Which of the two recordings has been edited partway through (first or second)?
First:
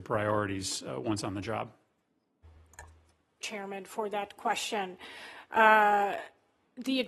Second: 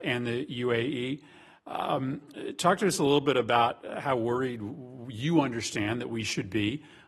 first